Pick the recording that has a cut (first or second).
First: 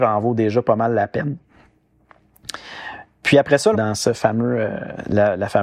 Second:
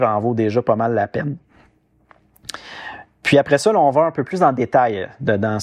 first